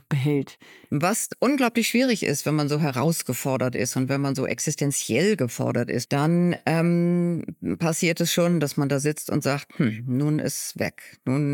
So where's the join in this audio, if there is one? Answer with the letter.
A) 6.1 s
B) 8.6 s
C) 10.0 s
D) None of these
A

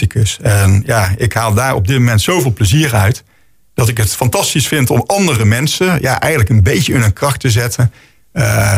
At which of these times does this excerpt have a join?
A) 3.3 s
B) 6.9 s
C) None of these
C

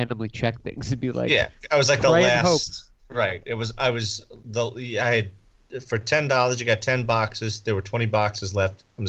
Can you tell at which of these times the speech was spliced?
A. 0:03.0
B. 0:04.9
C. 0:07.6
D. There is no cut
A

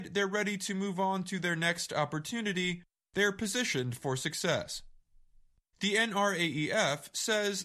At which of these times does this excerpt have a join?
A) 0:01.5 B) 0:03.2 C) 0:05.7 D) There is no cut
C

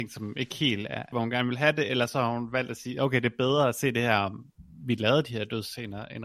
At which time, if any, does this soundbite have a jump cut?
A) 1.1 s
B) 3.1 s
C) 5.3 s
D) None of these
A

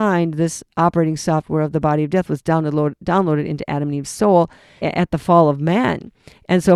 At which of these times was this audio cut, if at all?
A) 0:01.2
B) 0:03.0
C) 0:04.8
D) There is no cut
C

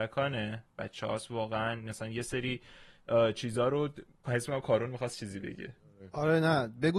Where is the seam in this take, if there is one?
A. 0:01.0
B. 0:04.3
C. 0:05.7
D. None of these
B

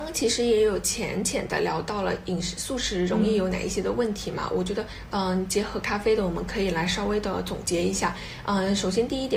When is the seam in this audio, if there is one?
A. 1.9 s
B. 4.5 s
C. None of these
C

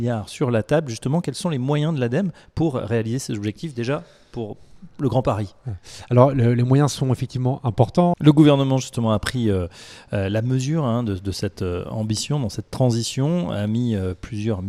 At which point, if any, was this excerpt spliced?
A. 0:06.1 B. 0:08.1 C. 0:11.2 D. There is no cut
B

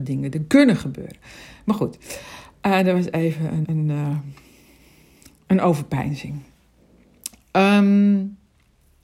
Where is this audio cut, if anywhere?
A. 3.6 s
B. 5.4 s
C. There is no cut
A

